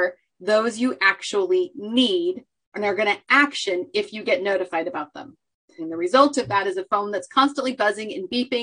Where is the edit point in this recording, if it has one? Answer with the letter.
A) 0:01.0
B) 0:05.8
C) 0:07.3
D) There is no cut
B